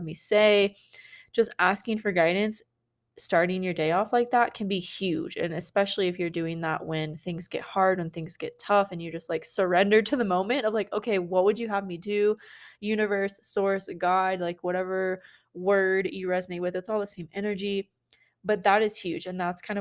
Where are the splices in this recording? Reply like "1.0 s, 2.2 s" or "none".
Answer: none